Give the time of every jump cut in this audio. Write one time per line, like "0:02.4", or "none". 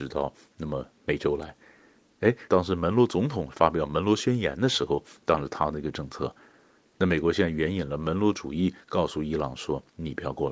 0:02.5

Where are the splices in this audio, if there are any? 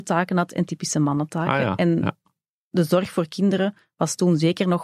none

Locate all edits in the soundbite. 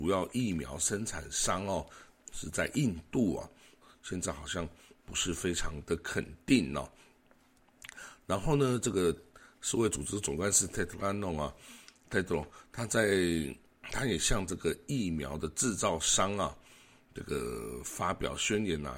0:03.8

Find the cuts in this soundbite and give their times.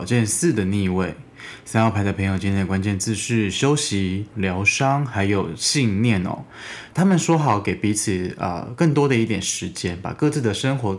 0:04.3
0:06.9

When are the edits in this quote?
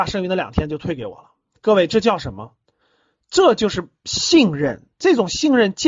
none

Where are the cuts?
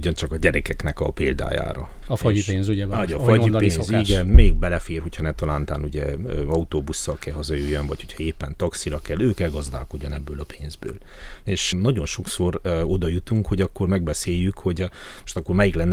0:02.0
0:11.7

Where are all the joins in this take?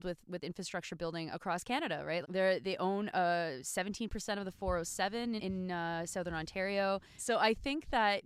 0:02.2
0:05.4
0:07.2

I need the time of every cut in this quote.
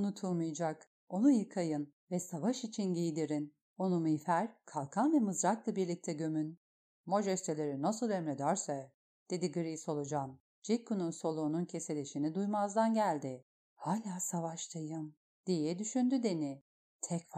0:10.5
0:13.6

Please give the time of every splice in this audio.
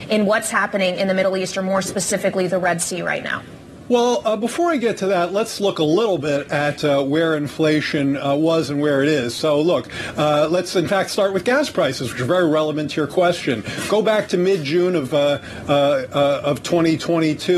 none

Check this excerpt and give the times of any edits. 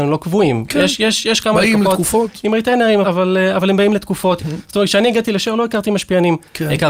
0:03.0
0:04.4

